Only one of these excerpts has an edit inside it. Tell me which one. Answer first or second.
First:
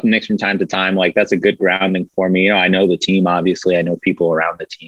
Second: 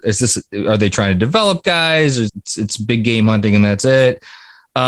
second